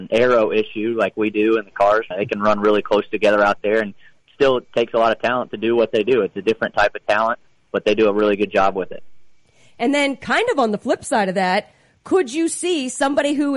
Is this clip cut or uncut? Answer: cut